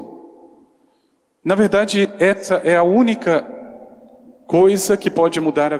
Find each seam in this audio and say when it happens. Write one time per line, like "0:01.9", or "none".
none